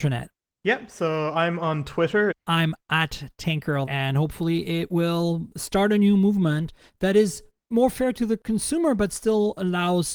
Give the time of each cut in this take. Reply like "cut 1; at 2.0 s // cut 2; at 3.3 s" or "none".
cut 1; at 2.3 s // cut 2; at 3.9 s